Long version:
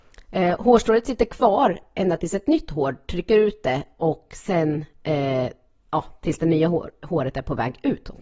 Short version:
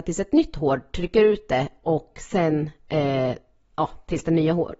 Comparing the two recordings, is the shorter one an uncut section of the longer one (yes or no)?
yes